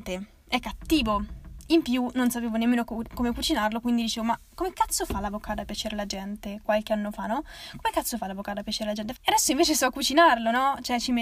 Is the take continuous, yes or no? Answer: no